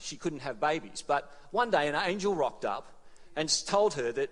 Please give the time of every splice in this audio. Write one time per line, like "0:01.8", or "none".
none